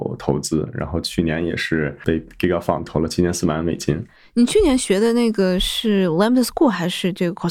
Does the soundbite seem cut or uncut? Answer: uncut